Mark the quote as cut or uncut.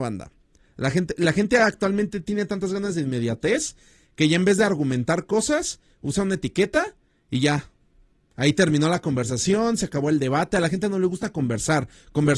uncut